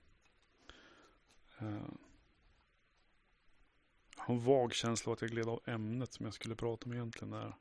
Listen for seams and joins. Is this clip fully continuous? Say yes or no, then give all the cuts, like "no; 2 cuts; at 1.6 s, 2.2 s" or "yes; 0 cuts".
yes; 0 cuts